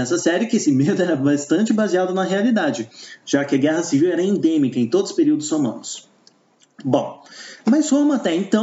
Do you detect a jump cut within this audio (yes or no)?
no